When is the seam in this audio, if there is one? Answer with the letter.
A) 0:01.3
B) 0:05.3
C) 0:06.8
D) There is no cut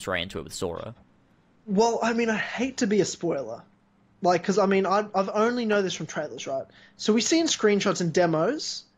D